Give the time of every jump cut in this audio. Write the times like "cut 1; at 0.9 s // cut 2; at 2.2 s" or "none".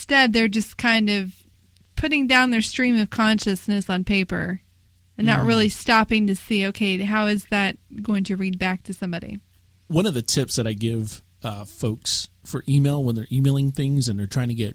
none